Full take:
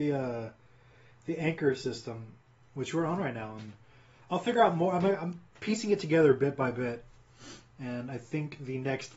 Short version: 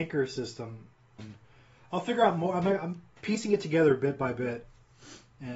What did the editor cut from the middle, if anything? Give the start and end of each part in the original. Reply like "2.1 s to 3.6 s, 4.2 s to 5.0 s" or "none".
2.7 s to 3.6 s